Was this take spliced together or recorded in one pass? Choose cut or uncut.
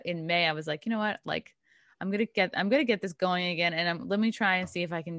uncut